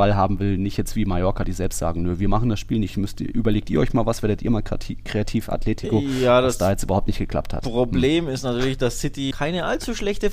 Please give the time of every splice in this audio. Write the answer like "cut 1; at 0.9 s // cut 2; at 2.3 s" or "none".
cut 1; at 9.3 s